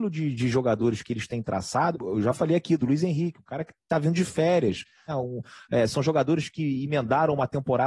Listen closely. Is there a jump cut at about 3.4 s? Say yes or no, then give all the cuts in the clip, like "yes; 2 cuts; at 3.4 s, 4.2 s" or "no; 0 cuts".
no; 2 cuts; at 1.9 s, 5.1 s